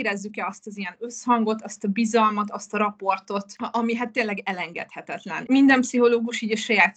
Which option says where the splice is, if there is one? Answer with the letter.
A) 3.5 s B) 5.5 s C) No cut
A